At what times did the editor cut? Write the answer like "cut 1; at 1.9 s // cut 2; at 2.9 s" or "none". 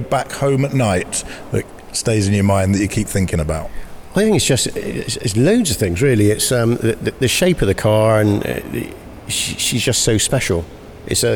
none